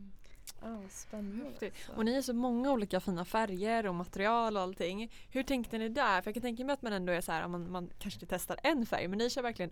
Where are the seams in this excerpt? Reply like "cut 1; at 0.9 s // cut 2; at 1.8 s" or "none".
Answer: none